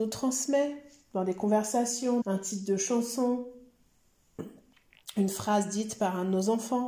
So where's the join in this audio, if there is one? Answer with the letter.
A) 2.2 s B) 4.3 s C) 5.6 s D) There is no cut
A